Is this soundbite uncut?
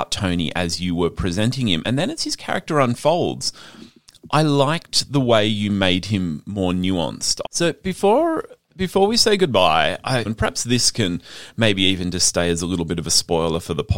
no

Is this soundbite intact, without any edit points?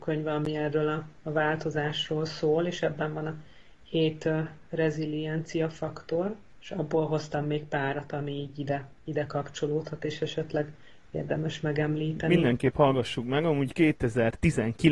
yes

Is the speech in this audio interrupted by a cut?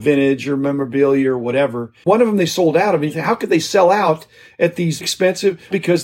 yes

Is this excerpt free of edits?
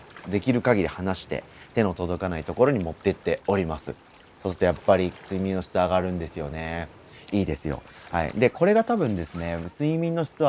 yes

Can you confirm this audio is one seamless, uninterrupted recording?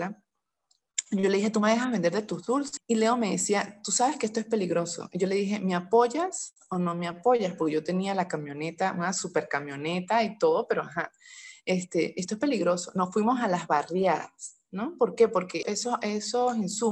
no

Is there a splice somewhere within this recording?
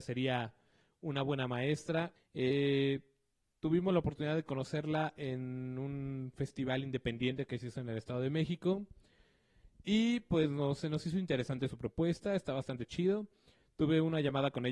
yes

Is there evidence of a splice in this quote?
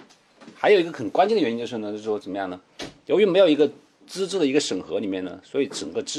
no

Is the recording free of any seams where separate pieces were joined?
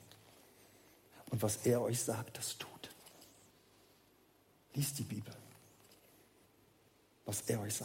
yes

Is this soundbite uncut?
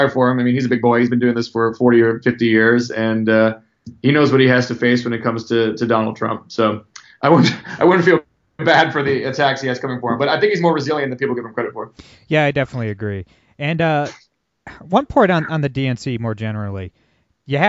yes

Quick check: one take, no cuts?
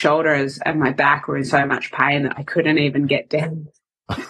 yes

